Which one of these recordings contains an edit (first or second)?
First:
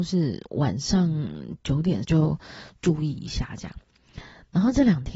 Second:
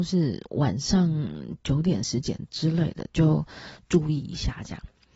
first